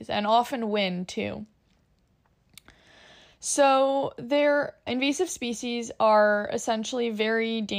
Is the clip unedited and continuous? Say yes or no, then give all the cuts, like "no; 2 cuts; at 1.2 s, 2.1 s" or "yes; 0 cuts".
no; 1 cut; at 4.9 s